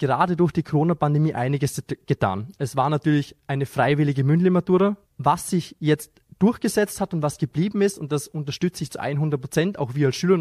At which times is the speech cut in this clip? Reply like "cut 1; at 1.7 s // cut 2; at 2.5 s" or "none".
cut 1; at 5.0 s